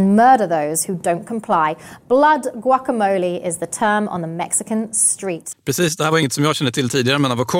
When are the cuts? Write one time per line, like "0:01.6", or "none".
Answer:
0:05.5